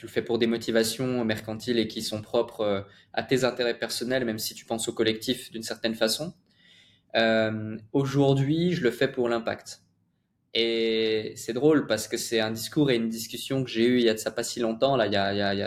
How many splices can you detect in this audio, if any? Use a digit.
0